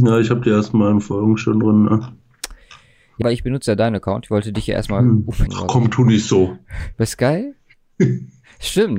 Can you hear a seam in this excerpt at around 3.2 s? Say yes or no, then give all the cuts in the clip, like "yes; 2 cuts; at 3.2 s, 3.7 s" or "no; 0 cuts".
yes; 3 cuts; at 3.2 s, 5.5 s, 6.9 s